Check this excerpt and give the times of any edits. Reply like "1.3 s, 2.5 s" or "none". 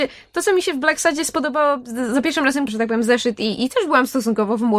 2.7 s